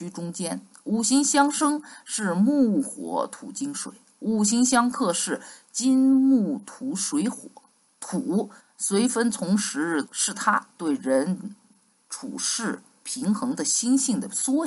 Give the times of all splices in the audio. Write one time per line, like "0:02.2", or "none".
0:08.6
0:10.1